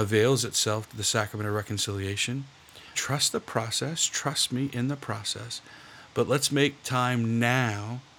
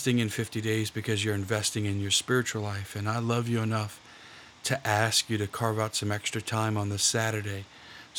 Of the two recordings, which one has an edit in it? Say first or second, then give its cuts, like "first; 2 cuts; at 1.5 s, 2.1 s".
first; 1 cut; at 2.9 s